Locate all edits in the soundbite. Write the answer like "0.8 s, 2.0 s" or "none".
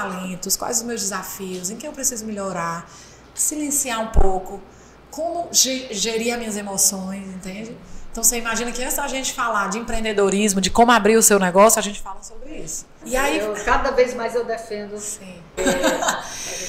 13.0 s, 15.6 s